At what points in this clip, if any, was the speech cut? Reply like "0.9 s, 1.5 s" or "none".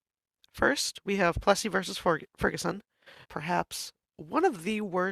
3.3 s